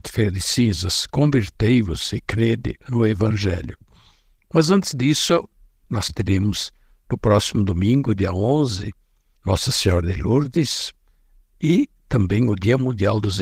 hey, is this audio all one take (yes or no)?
yes